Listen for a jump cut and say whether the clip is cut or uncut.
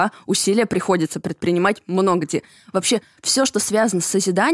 uncut